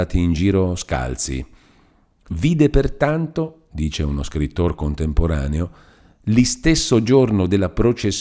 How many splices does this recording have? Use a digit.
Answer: 0